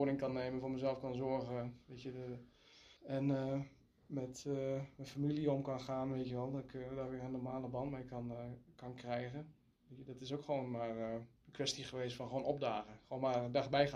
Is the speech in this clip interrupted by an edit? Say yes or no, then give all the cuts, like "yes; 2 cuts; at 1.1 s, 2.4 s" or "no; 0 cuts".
yes; 1 cut; at 3.0 s